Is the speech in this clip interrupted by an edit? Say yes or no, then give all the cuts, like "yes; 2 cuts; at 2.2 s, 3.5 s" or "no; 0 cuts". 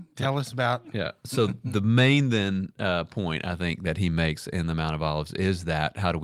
no; 0 cuts